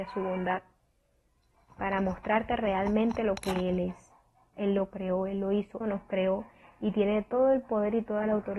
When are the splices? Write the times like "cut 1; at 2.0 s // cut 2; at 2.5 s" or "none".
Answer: cut 1; at 4.5 s // cut 2; at 5.8 s